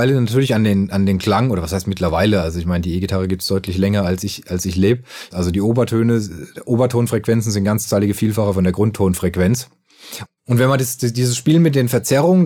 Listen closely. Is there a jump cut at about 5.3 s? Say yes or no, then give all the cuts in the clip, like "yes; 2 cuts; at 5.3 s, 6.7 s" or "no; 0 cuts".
yes; 2 cuts; at 5.3 s, 10.3 s